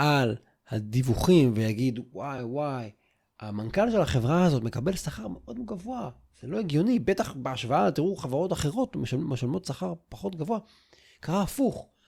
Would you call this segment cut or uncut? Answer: cut